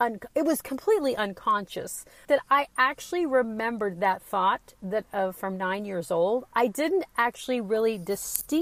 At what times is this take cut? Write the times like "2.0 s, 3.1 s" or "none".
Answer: 2.2 s